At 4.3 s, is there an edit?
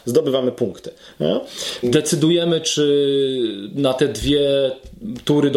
no; 1 cut; at 1.8 s

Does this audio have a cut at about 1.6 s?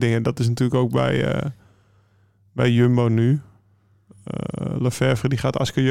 no; 0 cuts

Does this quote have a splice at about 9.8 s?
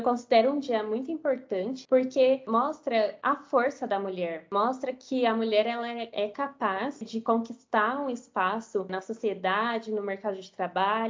no; 0 cuts

